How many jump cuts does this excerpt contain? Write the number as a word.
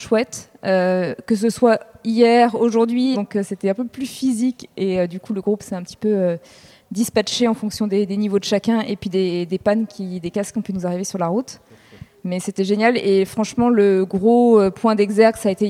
one